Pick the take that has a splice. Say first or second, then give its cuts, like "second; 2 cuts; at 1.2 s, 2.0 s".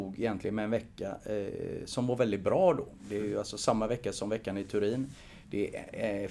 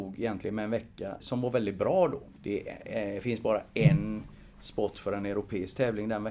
second; 2 cuts; at 1.2 s, 2.4 s